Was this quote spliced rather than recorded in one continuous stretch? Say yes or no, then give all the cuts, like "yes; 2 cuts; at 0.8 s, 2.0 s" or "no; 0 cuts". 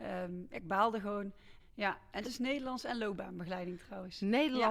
yes; 1 cut; at 1.6 s